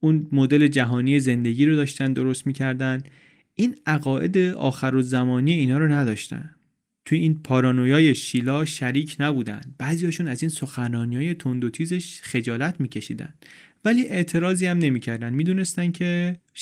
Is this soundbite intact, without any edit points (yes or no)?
yes